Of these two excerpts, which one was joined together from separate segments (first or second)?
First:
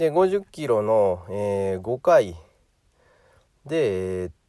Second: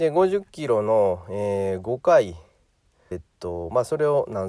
second